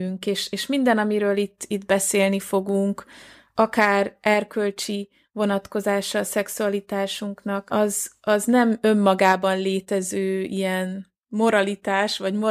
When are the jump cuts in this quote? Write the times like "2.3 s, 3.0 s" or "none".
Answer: none